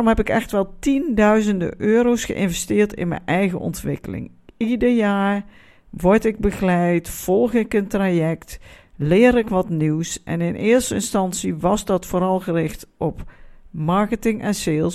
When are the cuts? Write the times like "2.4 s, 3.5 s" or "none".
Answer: none